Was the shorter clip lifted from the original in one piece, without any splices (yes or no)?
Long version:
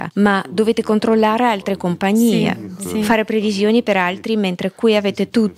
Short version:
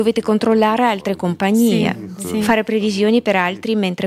yes